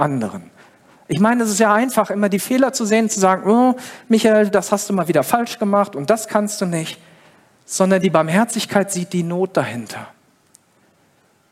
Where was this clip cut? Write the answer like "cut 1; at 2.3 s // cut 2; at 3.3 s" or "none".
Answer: none